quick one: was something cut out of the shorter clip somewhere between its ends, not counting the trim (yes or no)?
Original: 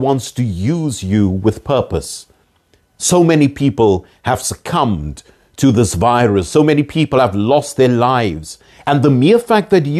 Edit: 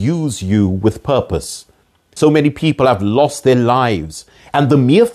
yes